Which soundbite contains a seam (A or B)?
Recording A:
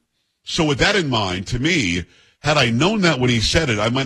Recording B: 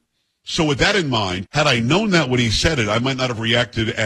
B